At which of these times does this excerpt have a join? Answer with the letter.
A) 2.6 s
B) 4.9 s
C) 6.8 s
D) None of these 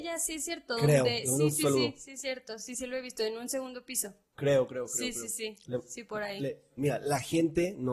C